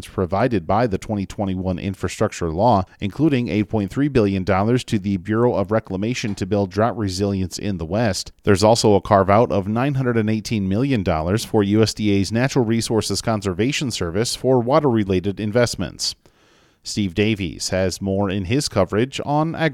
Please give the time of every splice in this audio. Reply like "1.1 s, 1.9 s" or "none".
none